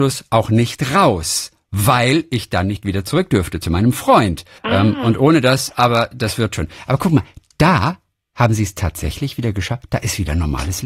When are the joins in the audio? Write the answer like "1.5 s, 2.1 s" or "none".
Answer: 4.6 s